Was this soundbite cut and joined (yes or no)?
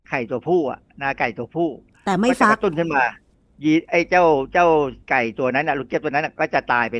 yes